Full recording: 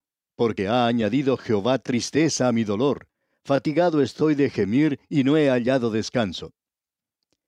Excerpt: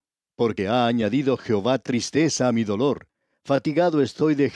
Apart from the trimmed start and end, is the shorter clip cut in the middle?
no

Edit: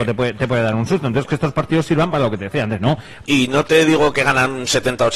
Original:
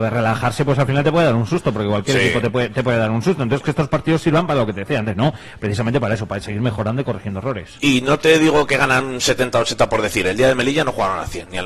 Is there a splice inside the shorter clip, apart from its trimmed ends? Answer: yes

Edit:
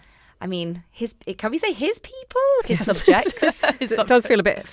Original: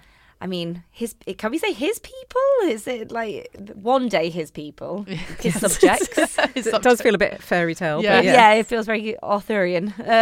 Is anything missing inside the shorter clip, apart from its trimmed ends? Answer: yes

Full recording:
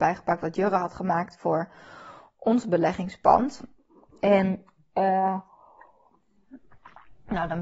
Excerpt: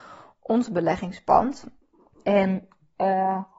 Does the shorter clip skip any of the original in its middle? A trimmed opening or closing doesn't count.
no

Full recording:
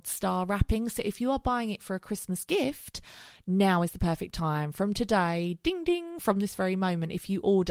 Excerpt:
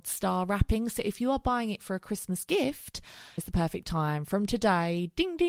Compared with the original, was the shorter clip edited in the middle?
yes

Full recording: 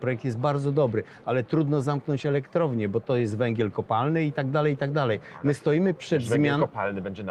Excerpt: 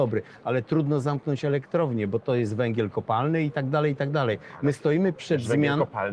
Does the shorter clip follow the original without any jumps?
yes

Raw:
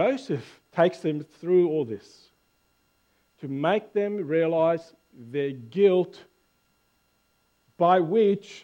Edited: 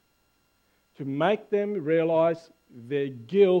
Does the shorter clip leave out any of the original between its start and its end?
no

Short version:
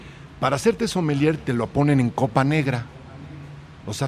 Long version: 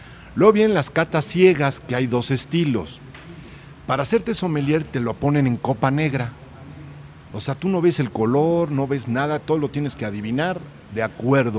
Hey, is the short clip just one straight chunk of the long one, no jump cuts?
yes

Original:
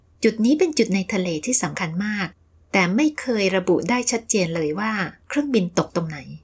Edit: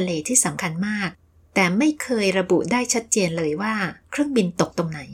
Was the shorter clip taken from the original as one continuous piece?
yes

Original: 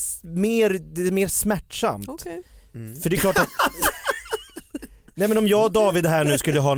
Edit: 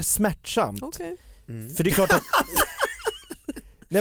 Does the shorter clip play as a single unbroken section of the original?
yes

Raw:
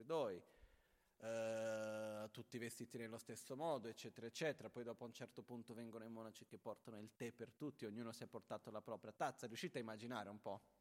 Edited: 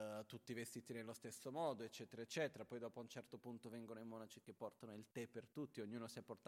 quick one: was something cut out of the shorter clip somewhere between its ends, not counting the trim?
no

